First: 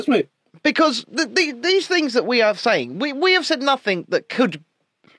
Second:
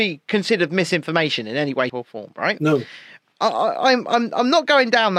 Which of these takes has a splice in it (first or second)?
second